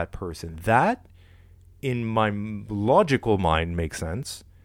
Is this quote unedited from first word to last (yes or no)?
yes